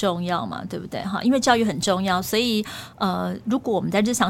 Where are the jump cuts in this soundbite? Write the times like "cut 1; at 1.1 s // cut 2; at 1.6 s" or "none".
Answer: none